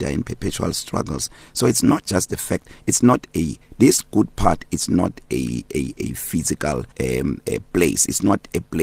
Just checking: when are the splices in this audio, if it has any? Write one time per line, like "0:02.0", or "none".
0:06.9